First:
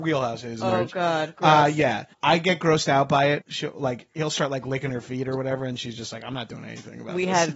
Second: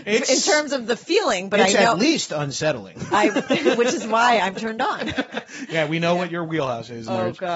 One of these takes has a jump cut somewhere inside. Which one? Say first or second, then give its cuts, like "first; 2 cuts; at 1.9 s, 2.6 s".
first; 2 cuts; at 2.1 s, 3.4 s